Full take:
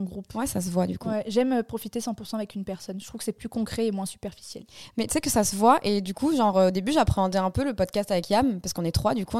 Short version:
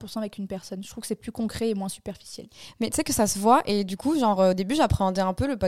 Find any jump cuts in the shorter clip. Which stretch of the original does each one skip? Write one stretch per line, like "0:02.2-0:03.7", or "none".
none

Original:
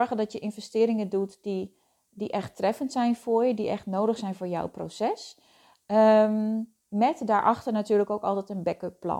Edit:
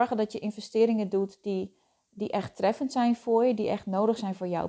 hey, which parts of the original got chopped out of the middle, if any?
none

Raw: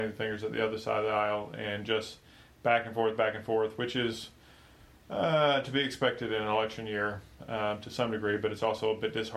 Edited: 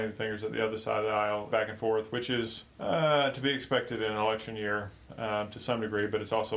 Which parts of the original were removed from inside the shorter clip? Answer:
0:01.5-0:03.2
0:04.4-0:05.0

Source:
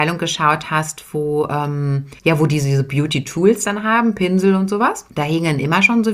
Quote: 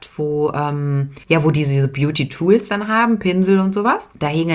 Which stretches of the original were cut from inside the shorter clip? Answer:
none

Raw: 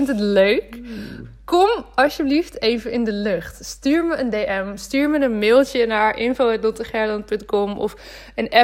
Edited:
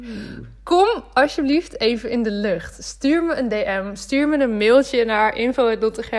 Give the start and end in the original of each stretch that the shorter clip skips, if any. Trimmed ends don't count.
none

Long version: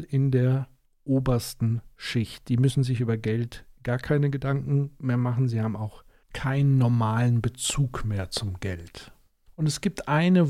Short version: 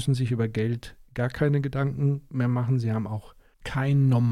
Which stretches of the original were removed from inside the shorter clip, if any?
none

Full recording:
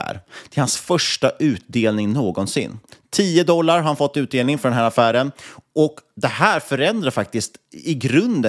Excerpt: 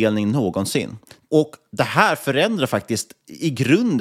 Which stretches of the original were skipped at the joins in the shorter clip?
0:03.1-0:05.7

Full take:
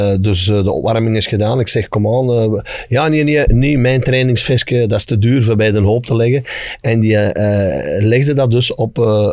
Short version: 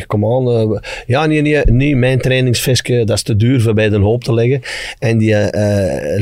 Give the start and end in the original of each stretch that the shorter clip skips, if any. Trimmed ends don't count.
none

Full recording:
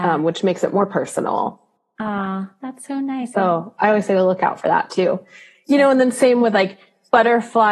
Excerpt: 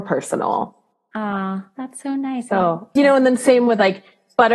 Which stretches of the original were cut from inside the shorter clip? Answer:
0:03.8-0:05.7

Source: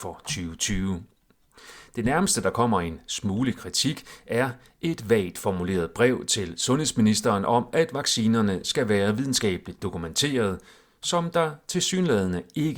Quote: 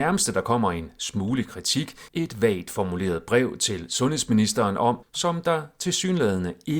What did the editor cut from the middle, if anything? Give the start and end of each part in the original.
0:04.2-0:04.8
0:07.7-0:10.9

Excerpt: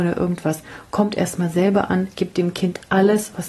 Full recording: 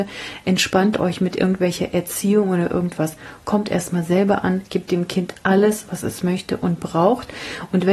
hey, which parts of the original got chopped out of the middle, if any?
none

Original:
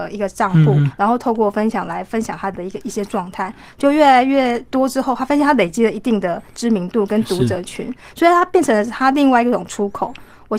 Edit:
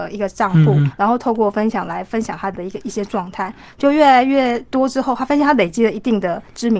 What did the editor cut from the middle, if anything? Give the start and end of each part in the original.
none

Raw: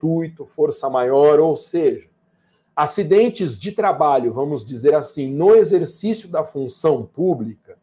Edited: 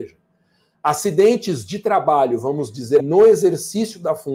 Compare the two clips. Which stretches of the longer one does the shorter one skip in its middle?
0:04.9-0:05.3

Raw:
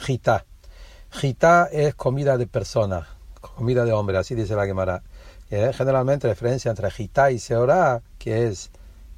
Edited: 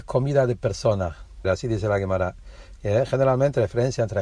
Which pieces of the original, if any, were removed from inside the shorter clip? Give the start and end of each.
0:03.4-0:04.1

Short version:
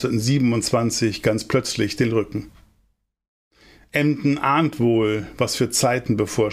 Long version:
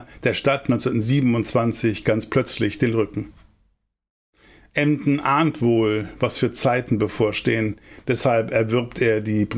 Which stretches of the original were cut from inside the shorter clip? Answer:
none

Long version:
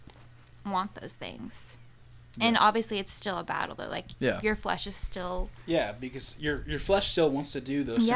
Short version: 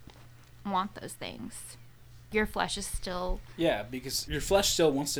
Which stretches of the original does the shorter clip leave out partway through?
0:02.3-0:04.4
0:06.4-0:06.7

